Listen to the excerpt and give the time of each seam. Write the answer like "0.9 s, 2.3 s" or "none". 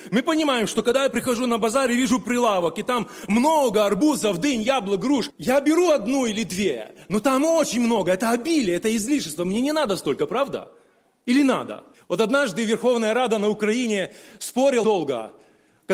11.9 s, 14.8 s